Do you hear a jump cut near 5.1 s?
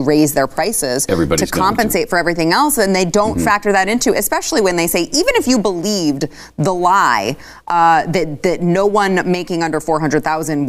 no; 0 cuts

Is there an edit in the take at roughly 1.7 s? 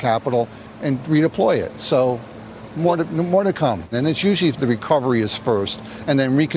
no; 1 cut; at 3.9 s

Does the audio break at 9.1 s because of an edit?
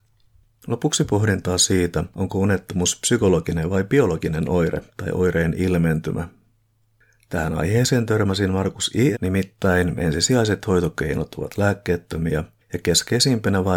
yes; 1 cut; at 9.1 s

